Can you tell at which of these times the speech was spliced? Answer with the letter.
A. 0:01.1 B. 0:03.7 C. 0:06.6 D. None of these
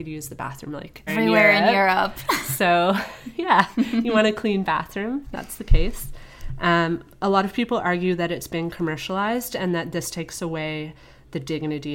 A